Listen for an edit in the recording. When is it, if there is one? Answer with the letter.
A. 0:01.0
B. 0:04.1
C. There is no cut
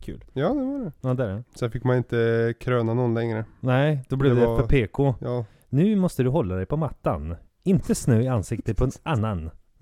A